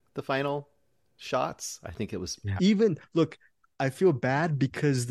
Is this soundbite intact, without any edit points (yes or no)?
no